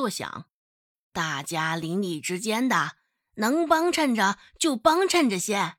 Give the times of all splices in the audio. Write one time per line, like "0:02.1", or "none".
0:00.9